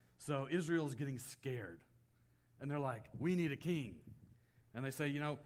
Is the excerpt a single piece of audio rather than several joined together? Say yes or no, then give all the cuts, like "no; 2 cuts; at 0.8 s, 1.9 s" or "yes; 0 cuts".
no; 1 cut; at 3.1 s